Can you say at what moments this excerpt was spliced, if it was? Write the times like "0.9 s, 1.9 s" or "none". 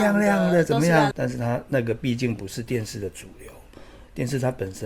1.1 s